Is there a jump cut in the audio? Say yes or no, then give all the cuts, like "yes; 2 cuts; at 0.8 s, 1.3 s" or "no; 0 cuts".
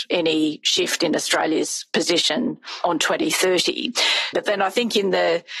yes; 1 cut; at 4.3 s